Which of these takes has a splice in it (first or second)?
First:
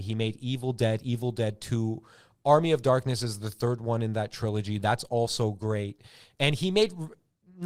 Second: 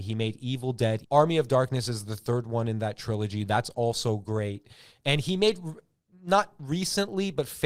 second